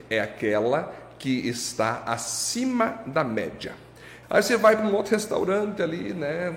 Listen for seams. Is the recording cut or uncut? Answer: cut